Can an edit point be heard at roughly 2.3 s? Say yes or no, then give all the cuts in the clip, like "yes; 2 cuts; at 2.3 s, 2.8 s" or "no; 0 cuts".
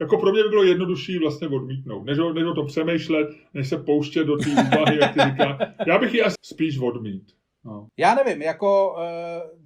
no; 2 cuts; at 6.4 s, 7.9 s